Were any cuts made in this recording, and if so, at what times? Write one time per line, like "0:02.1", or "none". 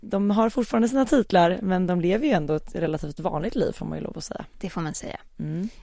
none